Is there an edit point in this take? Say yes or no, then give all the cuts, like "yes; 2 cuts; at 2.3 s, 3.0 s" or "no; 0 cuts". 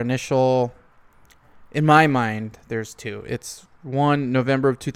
no; 0 cuts